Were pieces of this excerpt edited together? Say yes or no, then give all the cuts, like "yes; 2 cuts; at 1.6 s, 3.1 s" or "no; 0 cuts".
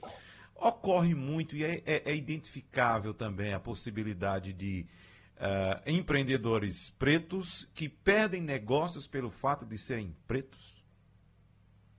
no; 0 cuts